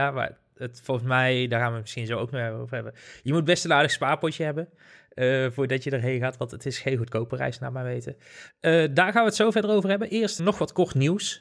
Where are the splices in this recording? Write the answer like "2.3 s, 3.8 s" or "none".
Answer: 8.5 s, 10.4 s